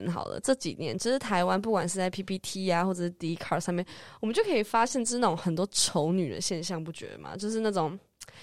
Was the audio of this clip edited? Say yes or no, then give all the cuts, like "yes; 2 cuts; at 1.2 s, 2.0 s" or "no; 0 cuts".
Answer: no; 0 cuts